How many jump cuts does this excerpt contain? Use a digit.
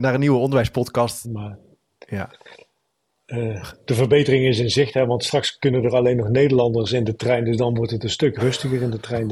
1